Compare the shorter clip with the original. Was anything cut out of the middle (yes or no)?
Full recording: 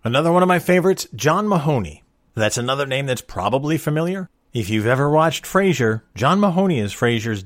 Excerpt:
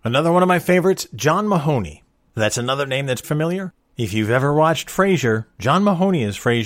yes